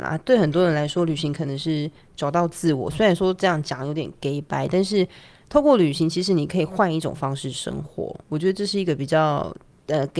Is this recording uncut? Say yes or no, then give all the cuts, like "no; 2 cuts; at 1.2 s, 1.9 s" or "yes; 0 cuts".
yes; 0 cuts